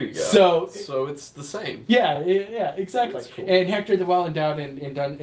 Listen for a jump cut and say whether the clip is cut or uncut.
uncut